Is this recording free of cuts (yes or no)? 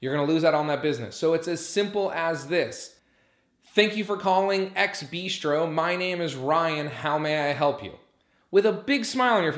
yes